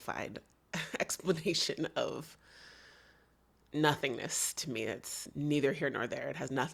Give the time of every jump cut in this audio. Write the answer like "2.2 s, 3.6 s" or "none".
none